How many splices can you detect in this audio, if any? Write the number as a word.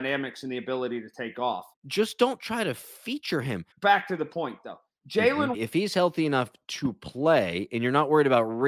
three